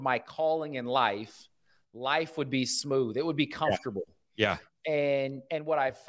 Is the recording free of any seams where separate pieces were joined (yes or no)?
yes